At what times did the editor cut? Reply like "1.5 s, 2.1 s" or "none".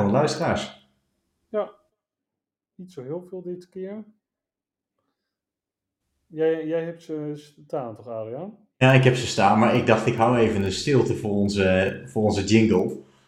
none

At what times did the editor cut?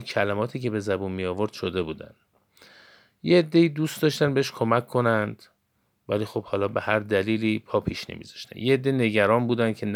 none

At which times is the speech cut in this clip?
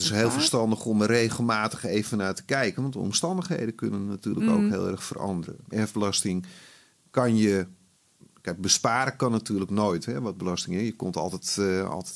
5.7 s

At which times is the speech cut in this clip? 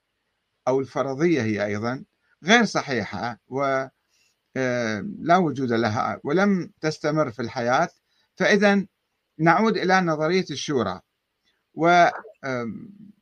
6.8 s

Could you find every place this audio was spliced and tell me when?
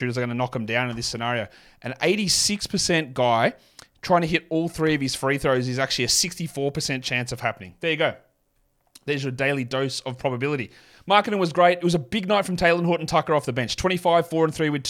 none

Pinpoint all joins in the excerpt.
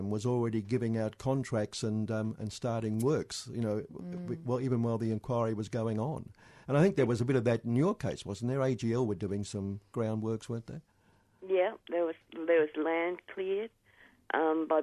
none

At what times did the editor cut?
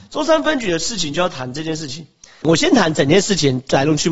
2.4 s

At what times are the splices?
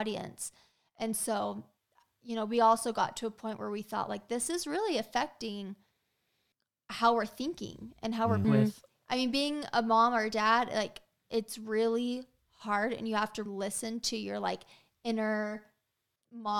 8.4 s, 13.5 s

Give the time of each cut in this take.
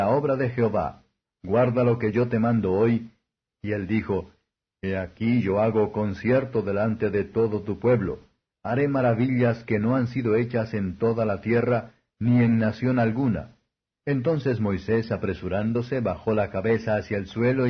1.2 s, 3.4 s, 14.0 s

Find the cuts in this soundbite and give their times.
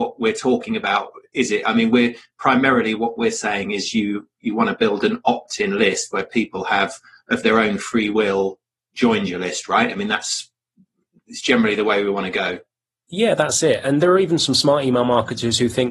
none

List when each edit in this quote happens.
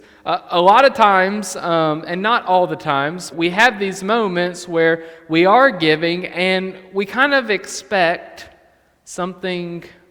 3.3 s

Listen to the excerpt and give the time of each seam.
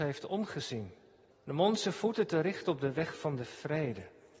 1.3 s

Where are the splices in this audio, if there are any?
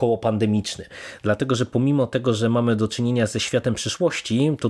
none

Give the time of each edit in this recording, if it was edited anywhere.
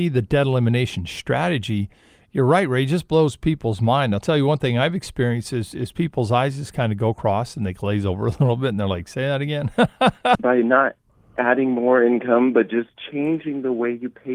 10.4 s

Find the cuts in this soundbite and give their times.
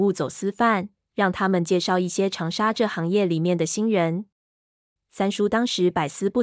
5.0 s

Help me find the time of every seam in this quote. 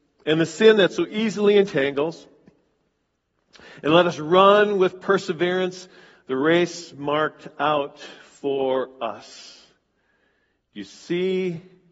none

